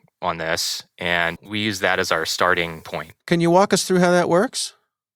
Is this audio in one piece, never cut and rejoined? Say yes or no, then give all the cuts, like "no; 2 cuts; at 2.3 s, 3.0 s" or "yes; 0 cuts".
no; 2 cuts; at 1.4 s, 3.2 s